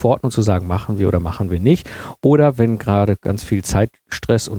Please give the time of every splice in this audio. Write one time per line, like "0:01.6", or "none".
none